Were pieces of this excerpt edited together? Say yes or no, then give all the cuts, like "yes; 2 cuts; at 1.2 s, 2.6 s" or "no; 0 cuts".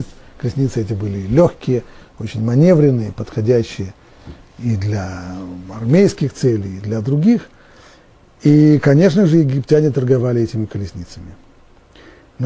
no; 0 cuts